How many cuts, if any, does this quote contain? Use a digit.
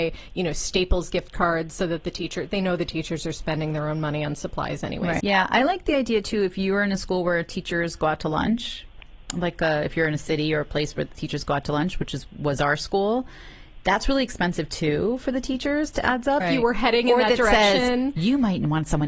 2